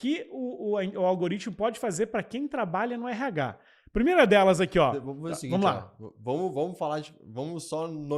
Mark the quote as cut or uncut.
uncut